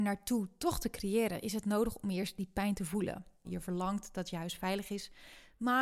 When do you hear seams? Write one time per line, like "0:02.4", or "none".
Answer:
0:03.4